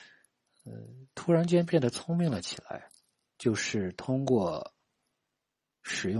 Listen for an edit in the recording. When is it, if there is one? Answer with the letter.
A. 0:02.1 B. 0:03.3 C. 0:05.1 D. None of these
B